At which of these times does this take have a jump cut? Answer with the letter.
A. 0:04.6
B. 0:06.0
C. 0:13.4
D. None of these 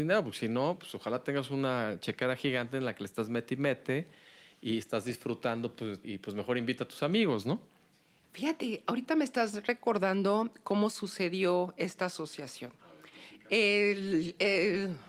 B